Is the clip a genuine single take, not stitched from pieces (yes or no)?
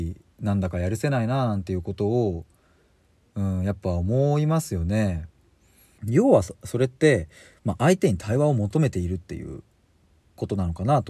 no